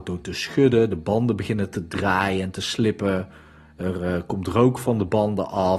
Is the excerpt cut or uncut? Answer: uncut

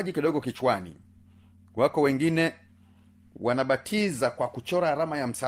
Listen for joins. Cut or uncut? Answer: uncut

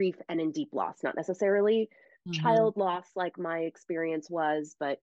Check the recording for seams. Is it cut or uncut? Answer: uncut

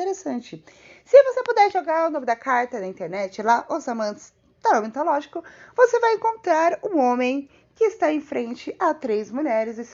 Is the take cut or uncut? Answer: uncut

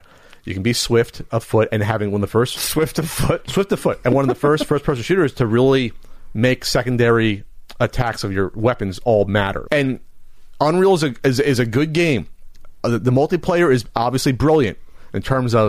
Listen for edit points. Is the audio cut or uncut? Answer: cut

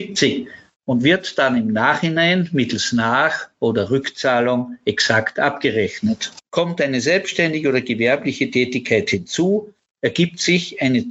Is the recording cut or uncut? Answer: cut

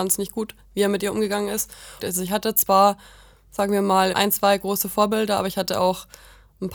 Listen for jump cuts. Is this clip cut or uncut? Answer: cut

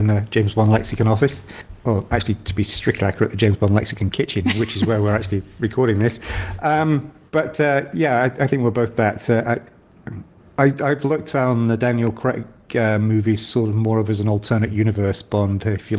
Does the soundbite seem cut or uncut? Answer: uncut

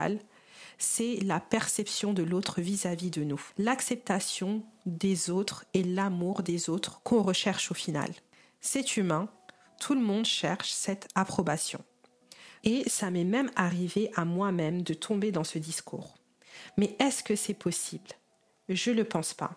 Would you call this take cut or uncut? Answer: cut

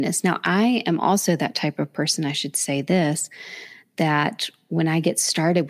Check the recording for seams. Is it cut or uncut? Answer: uncut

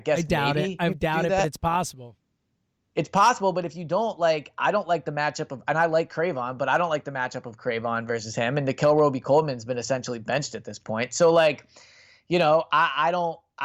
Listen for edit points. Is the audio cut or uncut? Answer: uncut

